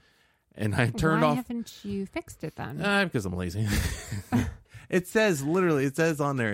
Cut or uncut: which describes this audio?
uncut